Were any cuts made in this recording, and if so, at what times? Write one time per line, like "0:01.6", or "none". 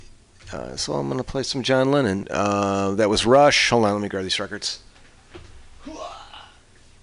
0:02.2

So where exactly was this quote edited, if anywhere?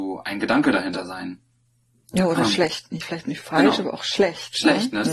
none

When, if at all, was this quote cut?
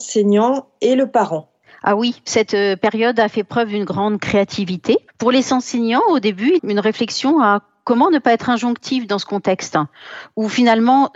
0:05.1
0:06.6

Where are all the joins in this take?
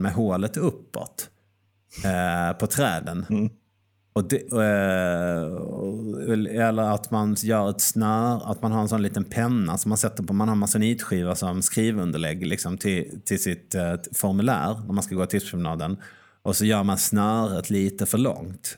none

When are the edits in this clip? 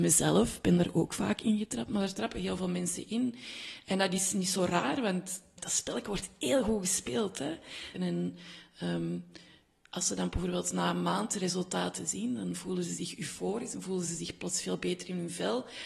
0:07.9

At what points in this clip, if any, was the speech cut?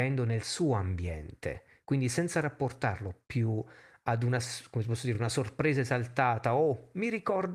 none

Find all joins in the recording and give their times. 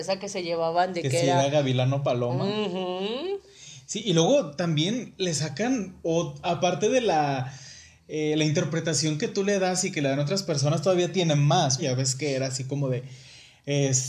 0:06.4
0:11.8

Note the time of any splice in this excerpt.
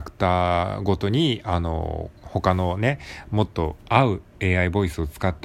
0:02.2

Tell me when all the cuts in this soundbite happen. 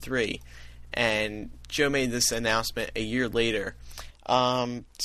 0:04.1

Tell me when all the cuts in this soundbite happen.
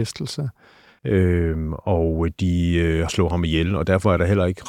0:01.0
0:03.1

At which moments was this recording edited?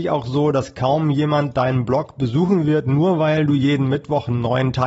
none

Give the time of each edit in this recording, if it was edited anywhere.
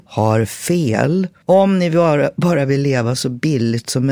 0:01.4

